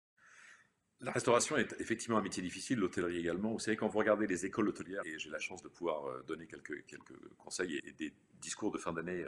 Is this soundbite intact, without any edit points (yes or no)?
no